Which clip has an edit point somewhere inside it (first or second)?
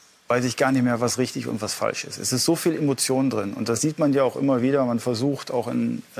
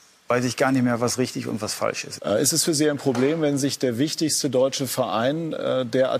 second